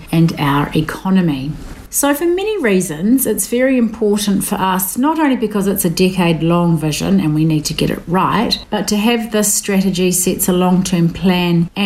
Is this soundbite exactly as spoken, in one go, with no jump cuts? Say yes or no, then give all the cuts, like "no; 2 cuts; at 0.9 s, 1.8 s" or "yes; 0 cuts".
no; 1 cut; at 1.9 s